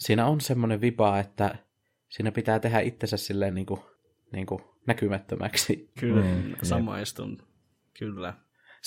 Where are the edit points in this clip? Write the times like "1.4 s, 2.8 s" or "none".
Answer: 6.0 s